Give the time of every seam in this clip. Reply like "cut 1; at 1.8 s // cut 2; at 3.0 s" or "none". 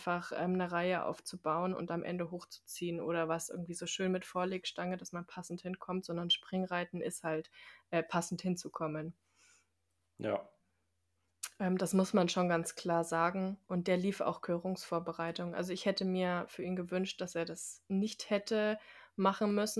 none